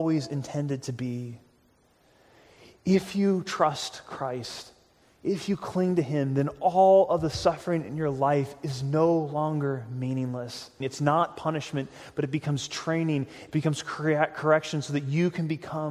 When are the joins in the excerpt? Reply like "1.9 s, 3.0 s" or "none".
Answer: 10.8 s, 13.5 s